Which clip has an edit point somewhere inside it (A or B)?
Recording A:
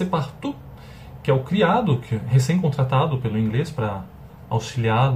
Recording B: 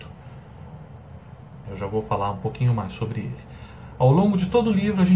B